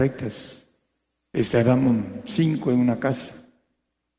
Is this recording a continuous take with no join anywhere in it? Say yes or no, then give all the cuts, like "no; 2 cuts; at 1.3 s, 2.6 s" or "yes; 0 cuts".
yes; 0 cuts